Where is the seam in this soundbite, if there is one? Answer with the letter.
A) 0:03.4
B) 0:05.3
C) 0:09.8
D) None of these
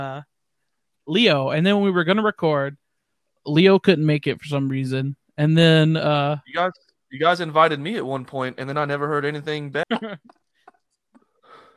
C